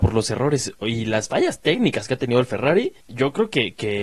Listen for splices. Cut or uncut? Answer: cut